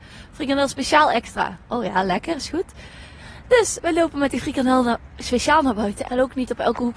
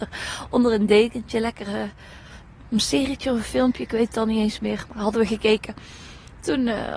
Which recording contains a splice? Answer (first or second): first